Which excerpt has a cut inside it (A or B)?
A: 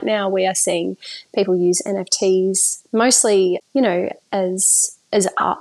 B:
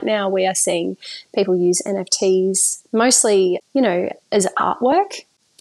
B